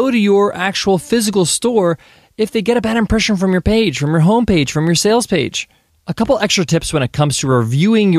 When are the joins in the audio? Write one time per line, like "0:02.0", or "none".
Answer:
0:05.9